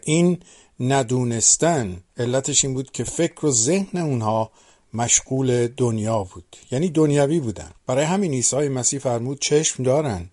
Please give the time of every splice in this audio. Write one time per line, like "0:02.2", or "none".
0:02.1
0:07.8